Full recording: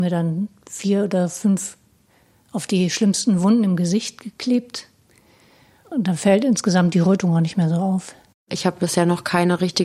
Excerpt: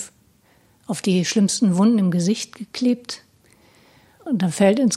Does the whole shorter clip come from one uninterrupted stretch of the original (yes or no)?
yes